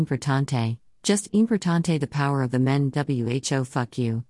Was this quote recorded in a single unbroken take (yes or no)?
yes